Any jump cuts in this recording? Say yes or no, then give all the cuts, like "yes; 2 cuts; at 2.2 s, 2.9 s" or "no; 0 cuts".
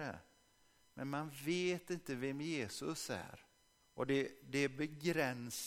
yes; 1 cut; at 3.8 s